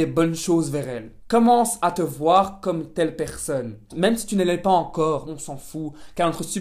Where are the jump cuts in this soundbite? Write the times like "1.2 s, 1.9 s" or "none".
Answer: 1.2 s, 3.9 s, 5.2 s